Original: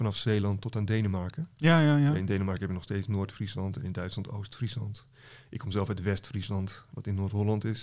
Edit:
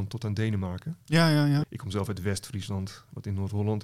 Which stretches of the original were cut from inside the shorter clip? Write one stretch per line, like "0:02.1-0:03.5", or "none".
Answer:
0:02.1-0:05.4